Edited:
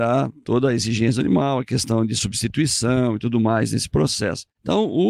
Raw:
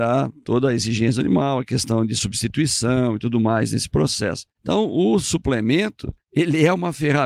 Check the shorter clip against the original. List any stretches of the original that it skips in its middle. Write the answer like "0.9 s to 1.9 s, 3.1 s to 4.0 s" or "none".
none